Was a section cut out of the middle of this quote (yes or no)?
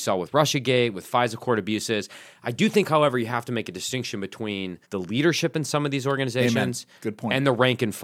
yes